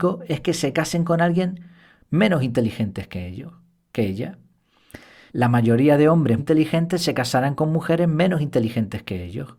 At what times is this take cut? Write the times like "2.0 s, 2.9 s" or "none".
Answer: 5.3 s, 6.4 s